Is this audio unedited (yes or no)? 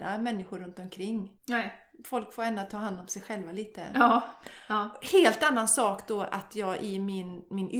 no